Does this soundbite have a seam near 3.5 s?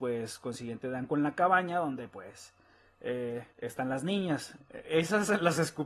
yes; 2 cuts; at 3.5 s, 4.6 s

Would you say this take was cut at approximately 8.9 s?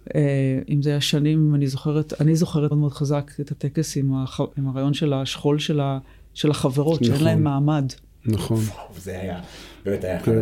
no; 2 cuts; at 2.7 s, 4.5 s

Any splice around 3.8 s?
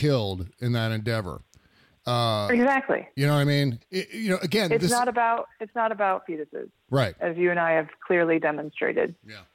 yes; 1 cut; at 3.8 s

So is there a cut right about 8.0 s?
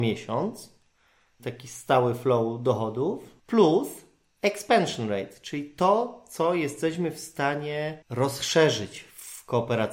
yes; 3 cuts; at 1.4 s, 3.4 s, 8.0 s

